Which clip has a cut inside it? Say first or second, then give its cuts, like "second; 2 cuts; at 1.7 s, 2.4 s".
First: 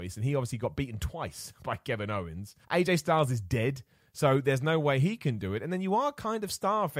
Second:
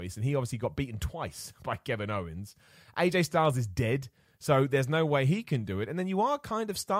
first; 1 cut; at 2.6 s